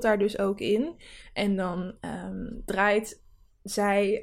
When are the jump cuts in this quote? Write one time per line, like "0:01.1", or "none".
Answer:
0:01.2